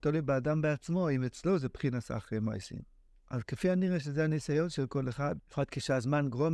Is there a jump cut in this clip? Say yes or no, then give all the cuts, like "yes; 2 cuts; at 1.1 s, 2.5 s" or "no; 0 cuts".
yes; 2 cuts; at 3.1 s, 5.4 s